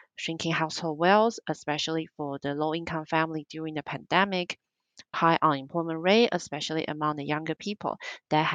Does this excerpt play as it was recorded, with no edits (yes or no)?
no